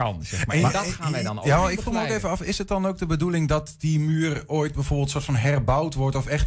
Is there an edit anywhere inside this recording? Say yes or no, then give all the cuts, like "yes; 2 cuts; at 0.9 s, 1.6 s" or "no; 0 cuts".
no; 0 cuts